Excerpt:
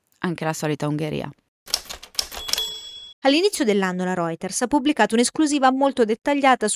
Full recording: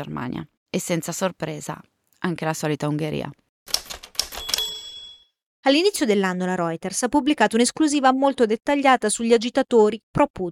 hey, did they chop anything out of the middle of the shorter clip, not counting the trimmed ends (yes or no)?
yes